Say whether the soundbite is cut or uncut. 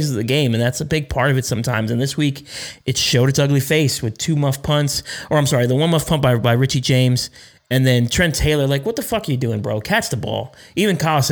uncut